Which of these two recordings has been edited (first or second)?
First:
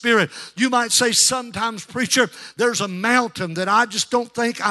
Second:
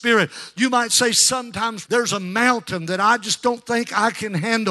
second